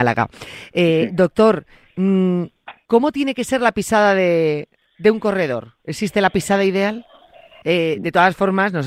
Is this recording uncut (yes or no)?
no